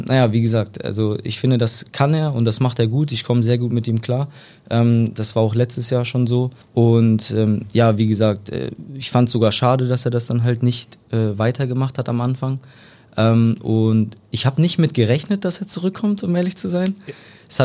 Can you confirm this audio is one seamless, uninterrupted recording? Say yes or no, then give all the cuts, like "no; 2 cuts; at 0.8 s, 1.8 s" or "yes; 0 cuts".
no; 1 cut; at 6.6 s